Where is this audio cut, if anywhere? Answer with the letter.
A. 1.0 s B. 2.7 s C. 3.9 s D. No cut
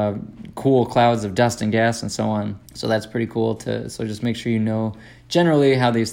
B